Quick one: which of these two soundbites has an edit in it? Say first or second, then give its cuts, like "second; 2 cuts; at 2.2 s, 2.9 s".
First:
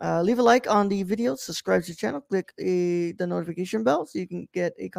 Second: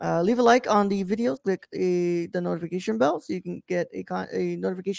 second; 1 cut; at 1.4 s